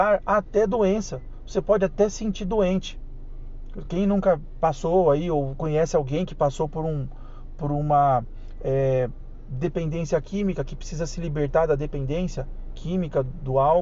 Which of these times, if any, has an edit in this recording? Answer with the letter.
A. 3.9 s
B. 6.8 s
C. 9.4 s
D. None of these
D